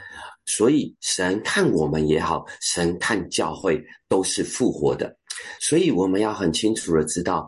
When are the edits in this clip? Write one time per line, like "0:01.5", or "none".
0:05.6